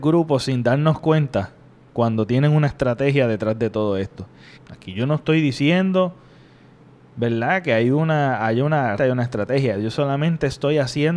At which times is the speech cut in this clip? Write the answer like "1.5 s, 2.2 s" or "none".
4.5 s, 9.0 s